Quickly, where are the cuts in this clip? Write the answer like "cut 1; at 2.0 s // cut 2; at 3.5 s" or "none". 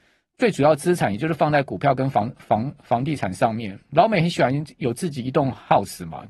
none